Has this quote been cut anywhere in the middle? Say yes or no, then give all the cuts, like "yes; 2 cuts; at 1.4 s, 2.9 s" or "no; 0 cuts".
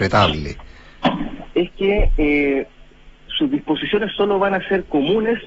yes; 1 cut; at 1.5 s